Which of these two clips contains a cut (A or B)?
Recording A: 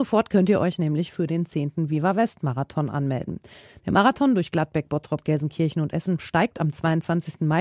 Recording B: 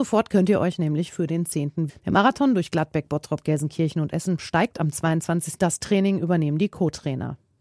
B